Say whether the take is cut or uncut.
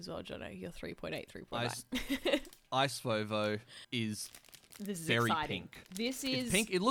cut